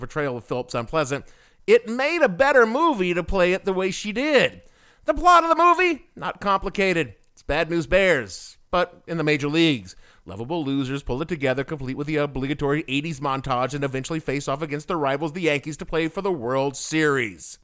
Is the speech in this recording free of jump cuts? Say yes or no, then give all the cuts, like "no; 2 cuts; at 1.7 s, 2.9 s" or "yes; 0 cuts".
yes; 0 cuts